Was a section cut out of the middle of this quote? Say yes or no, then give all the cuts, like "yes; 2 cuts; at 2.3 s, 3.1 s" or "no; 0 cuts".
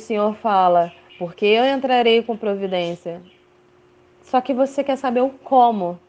yes; 1 cut; at 1.1 s